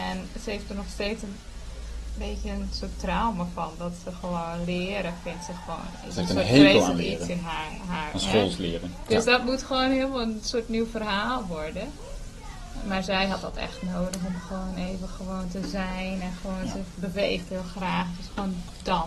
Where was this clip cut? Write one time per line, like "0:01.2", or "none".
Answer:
none